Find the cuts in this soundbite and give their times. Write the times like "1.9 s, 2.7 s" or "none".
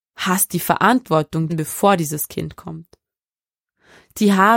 1.5 s